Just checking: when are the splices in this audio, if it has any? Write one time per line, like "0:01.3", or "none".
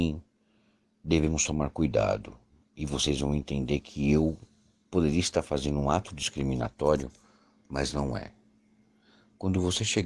none